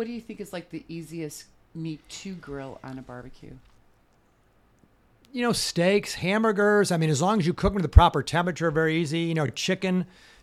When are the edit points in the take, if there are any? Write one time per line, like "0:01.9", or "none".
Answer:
none